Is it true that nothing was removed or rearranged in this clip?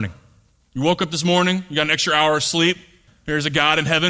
no; 1 cut; at 3.1 s

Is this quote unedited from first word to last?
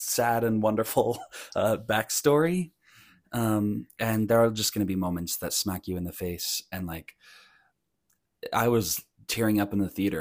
yes; 0 cuts

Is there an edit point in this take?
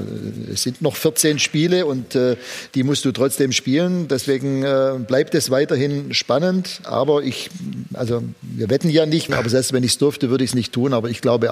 yes; 1 cut; at 9.3 s

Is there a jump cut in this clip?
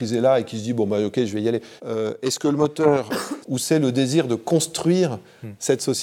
yes; 2 cuts; at 1.8 s, 3.4 s

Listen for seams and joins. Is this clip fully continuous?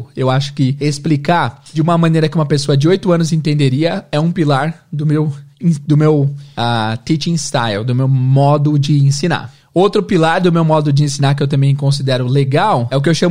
yes; 0 cuts

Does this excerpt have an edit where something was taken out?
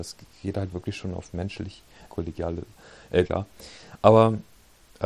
yes; 2 cuts; at 2.1 s, 3.2 s

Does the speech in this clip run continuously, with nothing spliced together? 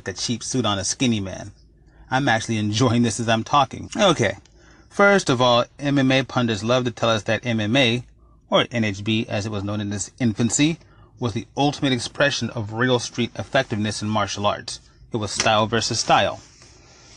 no; 1 cut; at 3.8 s

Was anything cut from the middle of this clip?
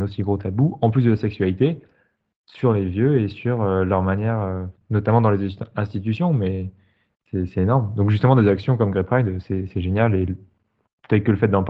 no; 0 cuts

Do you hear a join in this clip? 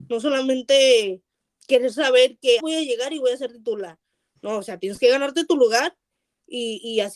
yes; 1 cut; at 2.6 s

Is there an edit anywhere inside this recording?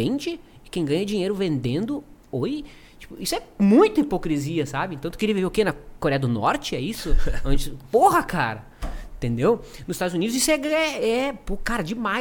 no; 0 cuts

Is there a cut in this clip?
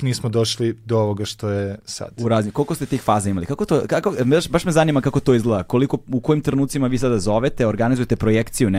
no; 0 cuts

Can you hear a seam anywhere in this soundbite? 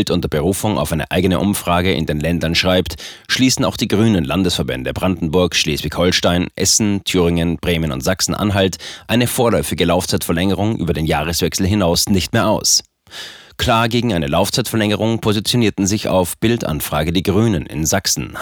no; 0 cuts

